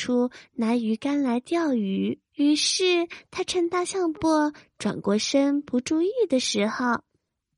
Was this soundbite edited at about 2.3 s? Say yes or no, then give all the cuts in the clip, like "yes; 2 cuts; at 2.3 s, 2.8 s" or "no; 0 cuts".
yes; 2 cuts; at 2.3 s, 4.1 s